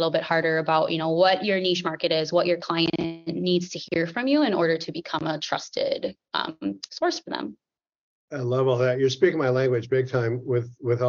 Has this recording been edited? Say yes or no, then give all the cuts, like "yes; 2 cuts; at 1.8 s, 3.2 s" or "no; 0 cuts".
no; 0 cuts